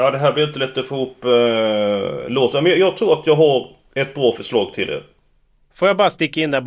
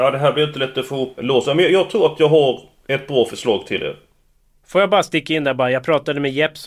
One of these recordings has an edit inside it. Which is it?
second; 1 cut; at 1.2 s

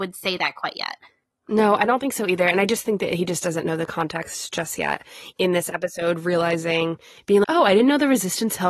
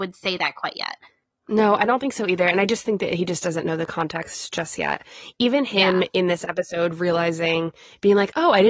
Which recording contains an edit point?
first; 2 cuts; at 5.4 s, 7.4 s

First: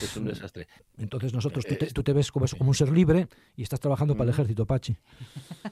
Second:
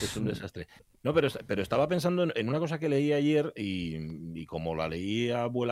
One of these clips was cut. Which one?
first; 1 cut; at 1.0 s

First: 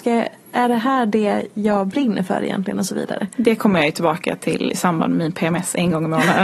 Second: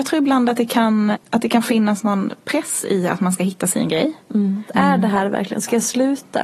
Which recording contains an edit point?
second; 2 cuts; at 1.1 s, 4.7 s

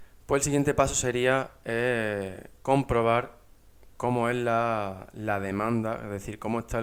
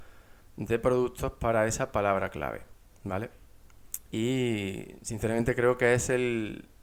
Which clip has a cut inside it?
second; 1 cut; at 4.1 s

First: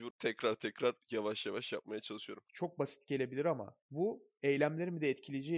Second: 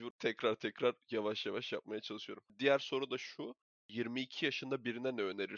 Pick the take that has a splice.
first; 1 cut; at 2.5 s

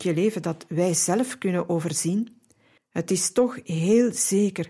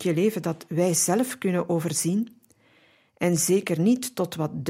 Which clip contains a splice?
first; 1 cut; at 2.8 s

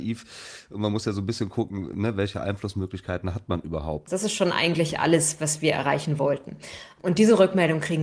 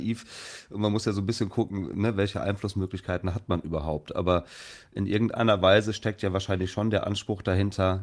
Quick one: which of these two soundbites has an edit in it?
first; 1 cut; at 4.1 s

